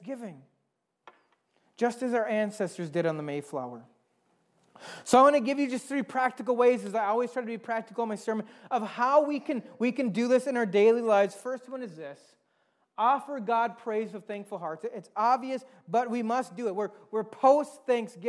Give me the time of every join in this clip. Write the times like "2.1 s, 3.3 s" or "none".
none